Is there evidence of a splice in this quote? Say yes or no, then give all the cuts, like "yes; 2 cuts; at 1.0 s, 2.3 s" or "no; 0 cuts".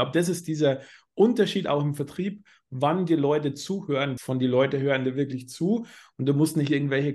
yes; 1 cut; at 4.2 s